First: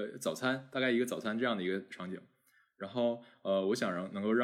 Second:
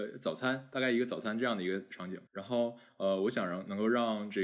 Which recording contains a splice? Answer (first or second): second